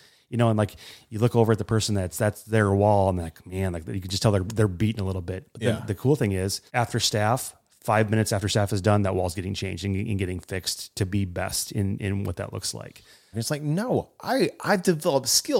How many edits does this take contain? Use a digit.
2